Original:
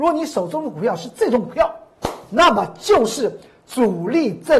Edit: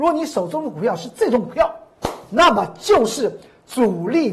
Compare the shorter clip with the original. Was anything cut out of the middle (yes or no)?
no